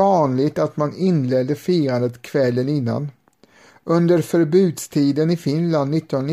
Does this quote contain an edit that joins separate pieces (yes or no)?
no